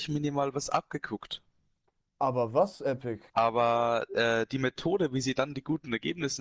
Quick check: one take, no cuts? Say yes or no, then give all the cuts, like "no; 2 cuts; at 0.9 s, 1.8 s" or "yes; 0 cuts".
no; 1 cut; at 3.3 s